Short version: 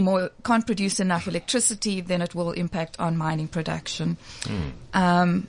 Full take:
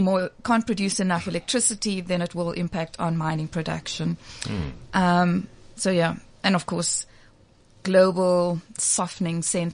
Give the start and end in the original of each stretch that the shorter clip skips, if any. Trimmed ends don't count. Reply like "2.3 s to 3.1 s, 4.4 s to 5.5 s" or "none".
none